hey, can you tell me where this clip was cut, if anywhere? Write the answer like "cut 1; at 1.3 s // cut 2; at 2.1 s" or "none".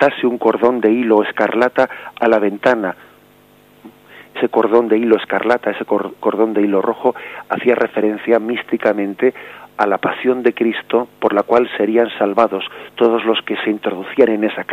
none